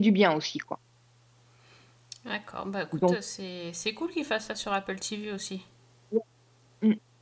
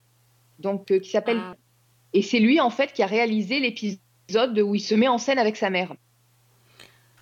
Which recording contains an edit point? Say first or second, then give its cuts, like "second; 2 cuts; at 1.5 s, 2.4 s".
second; 1 cut; at 1.5 s